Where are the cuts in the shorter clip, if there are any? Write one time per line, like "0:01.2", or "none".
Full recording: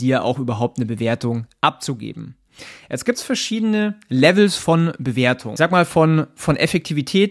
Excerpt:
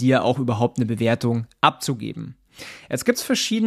none